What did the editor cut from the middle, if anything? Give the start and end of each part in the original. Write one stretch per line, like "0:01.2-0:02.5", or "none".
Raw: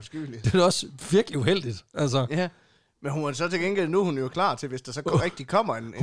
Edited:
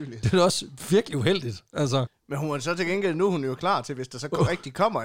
0:02.3-0:02.8